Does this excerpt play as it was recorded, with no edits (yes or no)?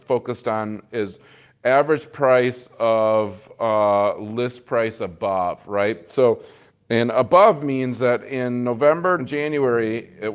no